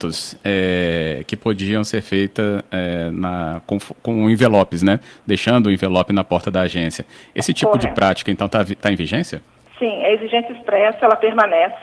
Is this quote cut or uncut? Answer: uncut